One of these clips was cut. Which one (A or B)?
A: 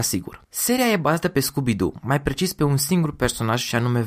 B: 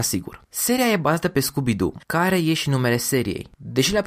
B